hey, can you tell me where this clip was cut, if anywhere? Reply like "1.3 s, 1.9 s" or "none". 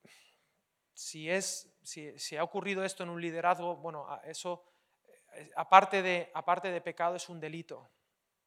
none

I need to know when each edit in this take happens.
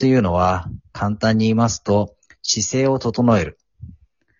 none

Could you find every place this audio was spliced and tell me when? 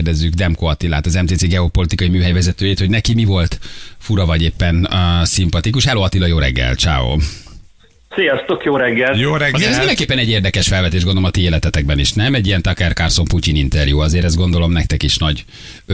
none

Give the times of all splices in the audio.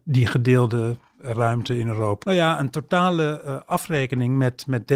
2.2 s

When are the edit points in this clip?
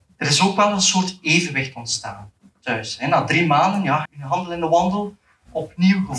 4.1 s

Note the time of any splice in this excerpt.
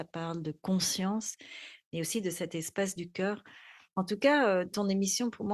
3.9 s

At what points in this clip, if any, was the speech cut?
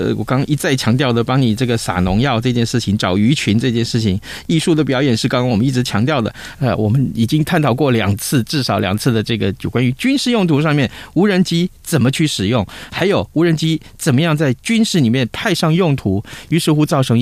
6.5 s

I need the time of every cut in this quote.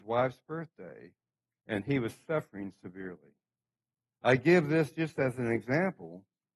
4.1 s

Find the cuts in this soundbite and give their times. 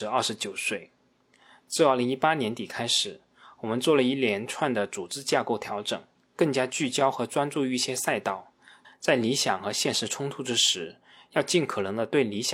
8.8 s

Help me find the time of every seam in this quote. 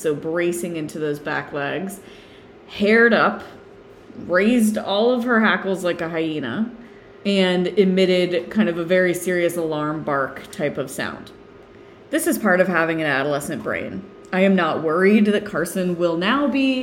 none

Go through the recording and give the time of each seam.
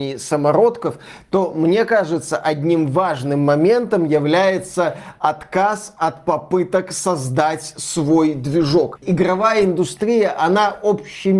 9.0 s

